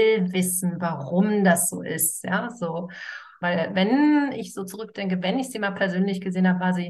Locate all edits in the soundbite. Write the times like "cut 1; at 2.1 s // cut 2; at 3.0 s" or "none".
cut 1; at 3.4 s

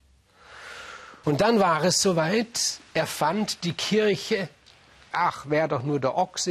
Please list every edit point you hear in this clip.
cut 1; at 1.2 s // cut 2; at 5.1 s

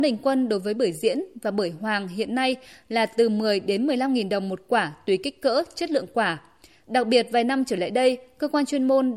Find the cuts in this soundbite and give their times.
none

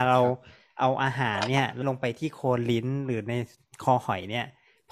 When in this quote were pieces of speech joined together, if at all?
cut 1; at 1.8 s

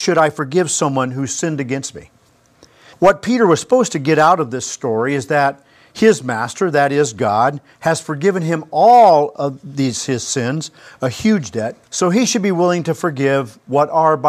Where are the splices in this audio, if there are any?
cut 1; at 2.9 s // cut 2; at 11.8 s

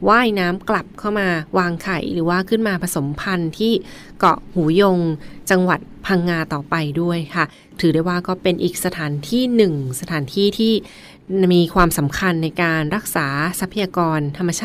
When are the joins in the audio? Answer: none

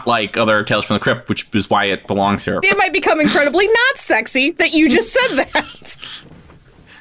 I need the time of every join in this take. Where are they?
cut 1; at 2.6 s

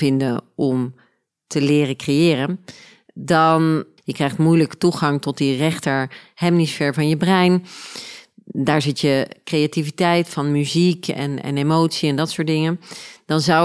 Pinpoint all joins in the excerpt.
cut 1; at 4.0 s

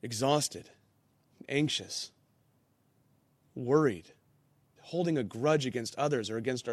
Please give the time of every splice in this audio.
cut 1; at 4.8 s

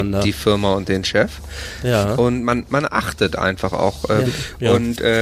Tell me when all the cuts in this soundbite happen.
cut 1; at 4.2 s

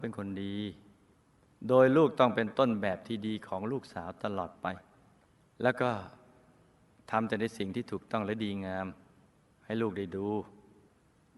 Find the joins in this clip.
none

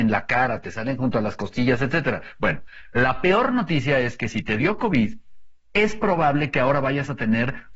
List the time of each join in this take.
none

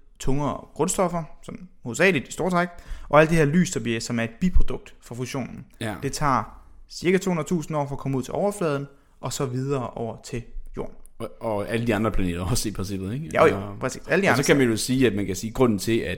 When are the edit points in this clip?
none

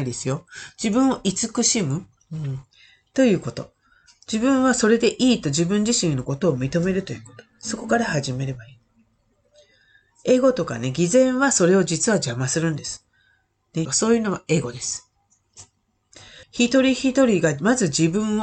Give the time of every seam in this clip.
cut 1; at 13.9 s // cut 2; at 16.4 s

